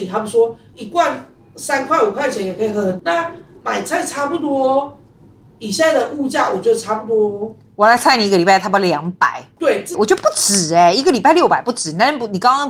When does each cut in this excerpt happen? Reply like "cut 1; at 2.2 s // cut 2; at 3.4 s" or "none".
cut 1; at 9.9 s